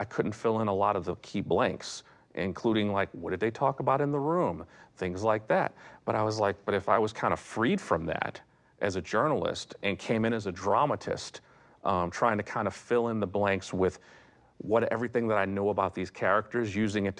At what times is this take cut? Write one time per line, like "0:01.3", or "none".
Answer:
none